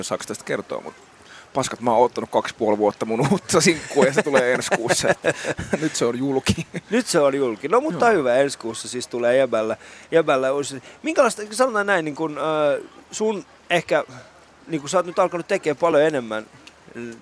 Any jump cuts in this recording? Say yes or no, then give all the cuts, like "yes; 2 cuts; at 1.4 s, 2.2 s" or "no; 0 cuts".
no; 0 cuts